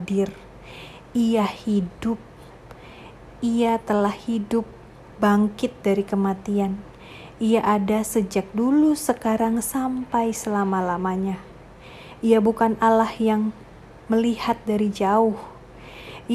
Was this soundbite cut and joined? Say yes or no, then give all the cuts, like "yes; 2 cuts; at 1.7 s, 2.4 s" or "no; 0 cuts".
no; 0 cuts